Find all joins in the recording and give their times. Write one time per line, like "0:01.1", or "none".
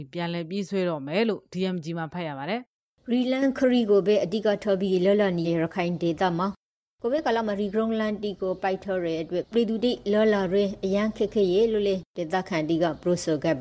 0:02.7
0:05.4